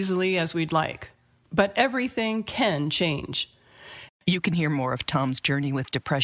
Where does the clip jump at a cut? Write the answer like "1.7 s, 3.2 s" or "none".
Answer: 1.4 s, 4.1 s